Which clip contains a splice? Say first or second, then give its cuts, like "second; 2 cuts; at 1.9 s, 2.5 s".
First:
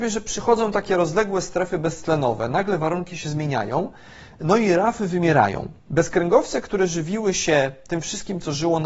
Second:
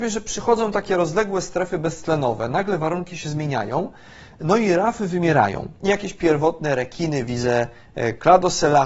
second; 1 cut; at 5.8 s